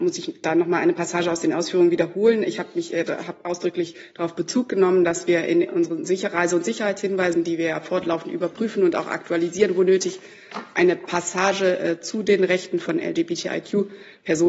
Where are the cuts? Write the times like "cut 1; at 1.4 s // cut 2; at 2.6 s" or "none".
none